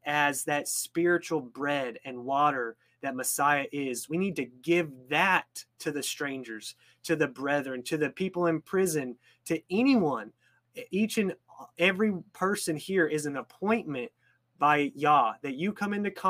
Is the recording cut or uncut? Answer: uncut